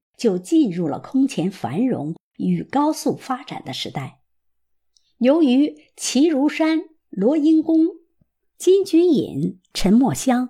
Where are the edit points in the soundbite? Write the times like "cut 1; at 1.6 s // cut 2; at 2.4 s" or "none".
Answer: none